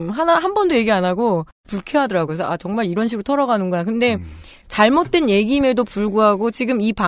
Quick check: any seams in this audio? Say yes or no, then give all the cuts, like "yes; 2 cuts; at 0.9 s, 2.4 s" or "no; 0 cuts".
no; 0 cuts